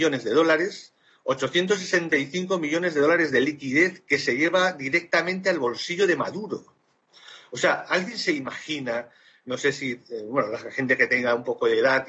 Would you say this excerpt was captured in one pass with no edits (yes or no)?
yes